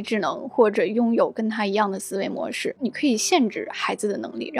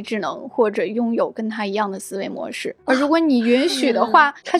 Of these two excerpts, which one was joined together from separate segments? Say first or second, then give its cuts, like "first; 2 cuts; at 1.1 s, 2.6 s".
first; 1 cut; at 2.8 s